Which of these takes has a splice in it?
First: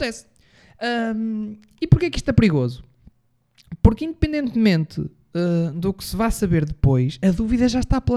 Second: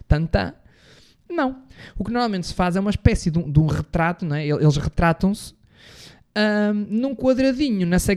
second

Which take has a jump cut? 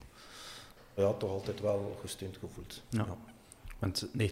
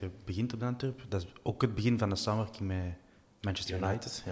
first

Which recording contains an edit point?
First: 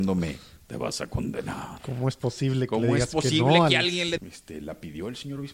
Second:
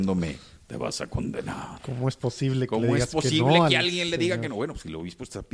first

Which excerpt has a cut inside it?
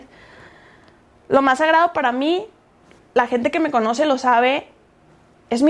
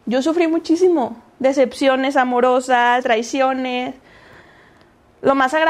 second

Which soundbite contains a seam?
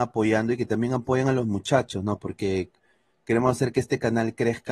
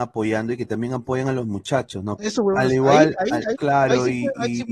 second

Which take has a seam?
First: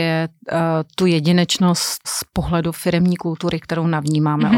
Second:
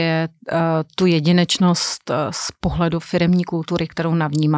first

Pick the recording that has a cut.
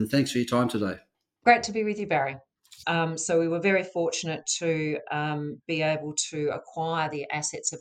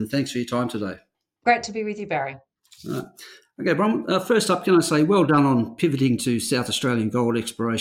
first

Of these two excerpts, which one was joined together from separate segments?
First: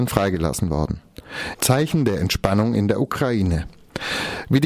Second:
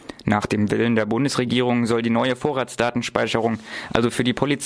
first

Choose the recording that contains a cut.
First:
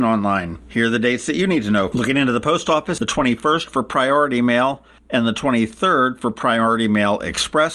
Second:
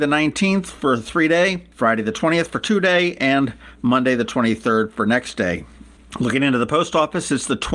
first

